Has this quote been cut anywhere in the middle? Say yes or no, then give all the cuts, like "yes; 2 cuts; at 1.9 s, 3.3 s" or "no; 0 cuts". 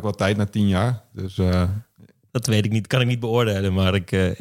no; 0 cuts